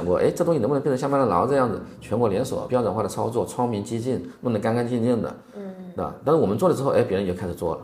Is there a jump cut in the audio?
no; 0 cuts

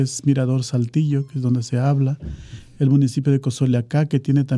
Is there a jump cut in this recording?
no; 0 cuts

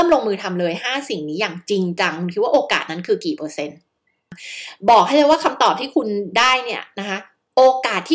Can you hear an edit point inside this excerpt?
no; 0 cuts

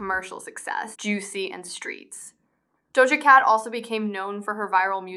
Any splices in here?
yes; 1 cut; at 0.9 s

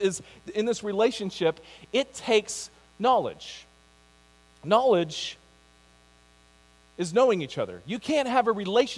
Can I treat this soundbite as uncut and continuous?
yes; 0 cuts

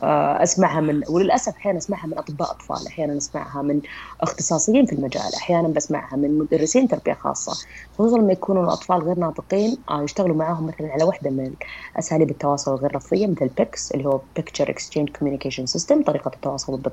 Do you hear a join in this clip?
no; 0 cuts

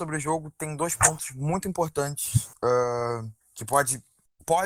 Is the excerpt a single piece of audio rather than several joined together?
no; 1 cut; at 3.4 s

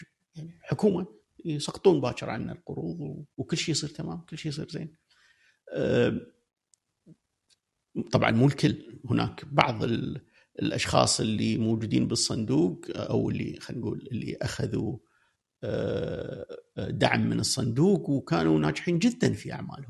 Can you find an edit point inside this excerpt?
yes; 1 cut; at 3.3 s

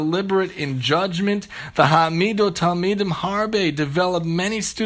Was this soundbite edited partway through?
no; 0 cuts

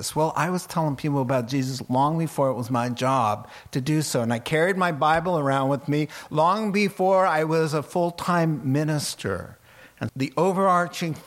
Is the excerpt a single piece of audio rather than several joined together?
no; 1 cut; at 10.1 s

